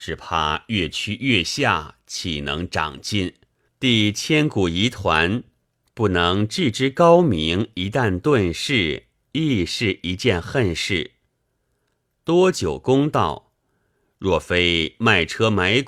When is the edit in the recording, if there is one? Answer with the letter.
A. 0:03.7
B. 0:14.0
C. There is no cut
A